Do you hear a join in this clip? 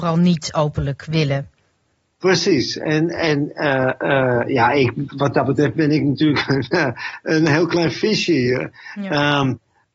no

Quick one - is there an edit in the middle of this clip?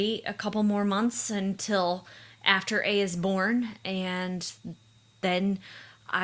no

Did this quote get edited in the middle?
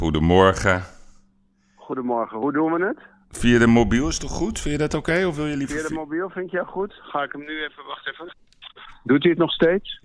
yes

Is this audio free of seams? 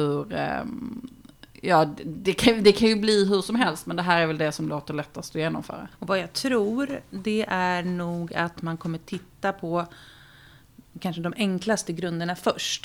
no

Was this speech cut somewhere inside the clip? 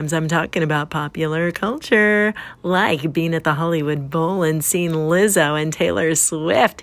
no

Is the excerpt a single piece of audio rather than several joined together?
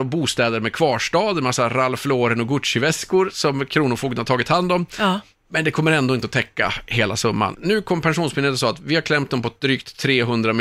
no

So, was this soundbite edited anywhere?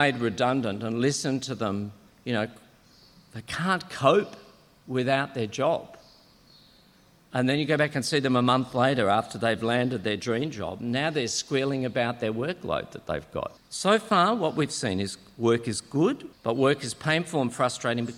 yes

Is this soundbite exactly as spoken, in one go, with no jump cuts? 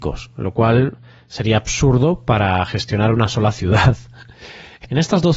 yes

